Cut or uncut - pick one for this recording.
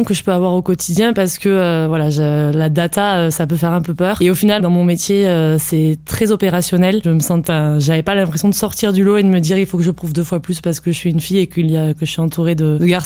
cut